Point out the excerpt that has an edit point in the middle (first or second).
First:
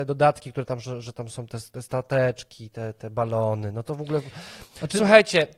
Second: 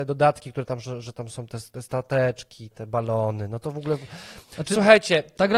second